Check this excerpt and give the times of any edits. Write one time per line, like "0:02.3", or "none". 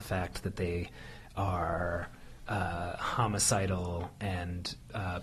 none